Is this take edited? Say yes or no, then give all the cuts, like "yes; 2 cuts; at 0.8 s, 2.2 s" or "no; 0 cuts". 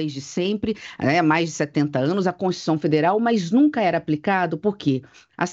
no; 0 cuts